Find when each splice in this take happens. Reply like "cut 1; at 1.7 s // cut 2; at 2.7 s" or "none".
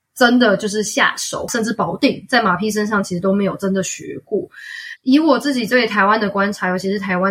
cut 1; at 1.5 s // cut 2; at 5.0 s